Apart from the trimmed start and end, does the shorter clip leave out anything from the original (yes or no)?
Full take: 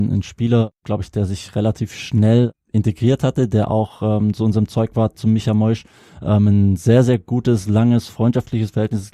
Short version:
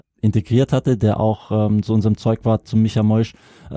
no